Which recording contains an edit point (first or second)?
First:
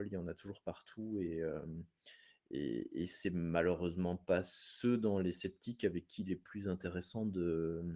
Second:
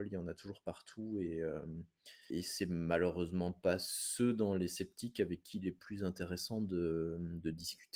second